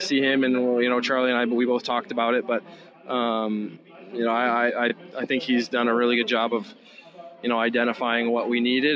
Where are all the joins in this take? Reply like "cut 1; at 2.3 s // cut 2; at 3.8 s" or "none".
none